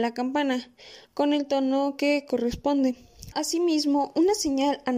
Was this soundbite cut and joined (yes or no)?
yes